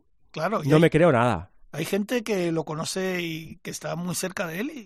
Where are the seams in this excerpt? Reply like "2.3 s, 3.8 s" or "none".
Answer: none